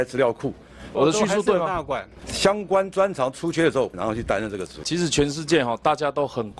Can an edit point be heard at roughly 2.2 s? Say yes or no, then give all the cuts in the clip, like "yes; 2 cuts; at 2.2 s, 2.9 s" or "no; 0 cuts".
yes; 3 cuts; at 0.9 s, 2.2 s, 3.9 s